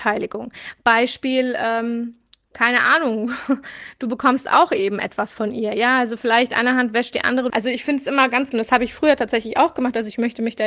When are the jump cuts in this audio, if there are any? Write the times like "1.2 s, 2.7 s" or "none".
7.5 s, 8.5 s